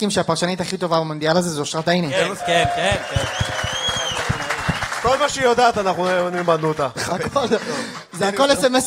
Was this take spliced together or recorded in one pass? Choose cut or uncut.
cut